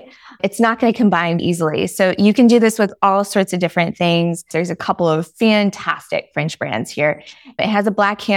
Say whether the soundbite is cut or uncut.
cut